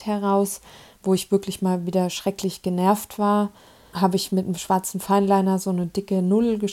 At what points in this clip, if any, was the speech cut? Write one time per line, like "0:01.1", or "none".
0:03.9